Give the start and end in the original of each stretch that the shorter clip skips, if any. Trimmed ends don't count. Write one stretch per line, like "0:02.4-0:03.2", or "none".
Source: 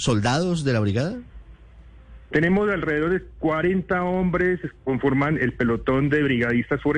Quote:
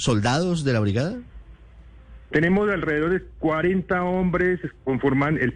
none